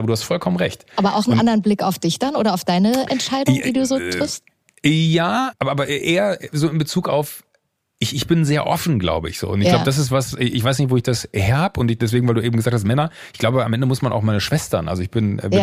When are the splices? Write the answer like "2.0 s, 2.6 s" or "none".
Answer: 5.5 s